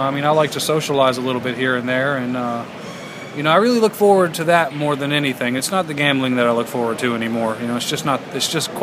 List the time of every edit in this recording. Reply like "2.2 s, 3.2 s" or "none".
none

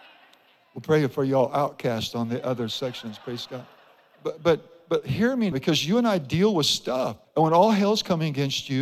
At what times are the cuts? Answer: 5.5 s, 7.2 s

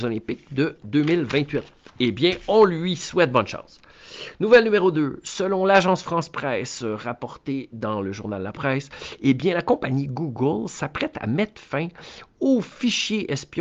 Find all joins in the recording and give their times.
none

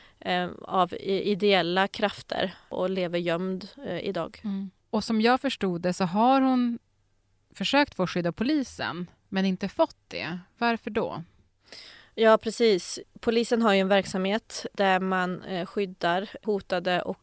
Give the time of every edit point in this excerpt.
none

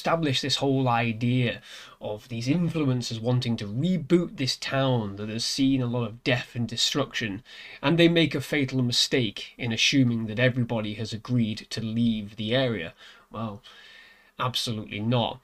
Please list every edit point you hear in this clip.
7.8 s

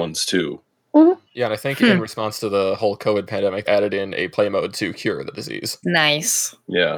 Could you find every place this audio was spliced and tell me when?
3.7 s, 5.8 s

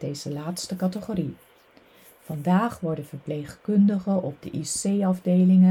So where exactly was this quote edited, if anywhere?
none

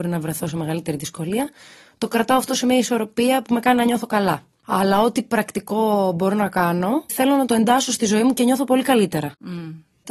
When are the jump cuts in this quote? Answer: 4.6 s

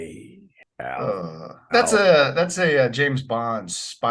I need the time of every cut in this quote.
1.7 s

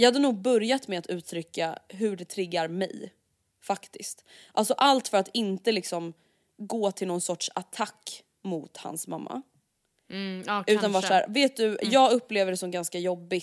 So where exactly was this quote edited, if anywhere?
none

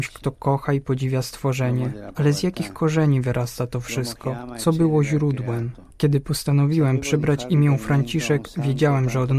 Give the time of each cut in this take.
5.9 s

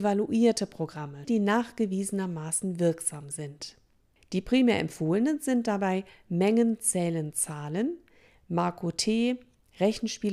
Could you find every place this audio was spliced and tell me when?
1.2 s

